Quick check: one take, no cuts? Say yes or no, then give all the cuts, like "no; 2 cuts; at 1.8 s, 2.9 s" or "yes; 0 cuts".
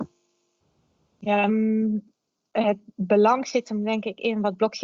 no; 1 cut; at 1.5 s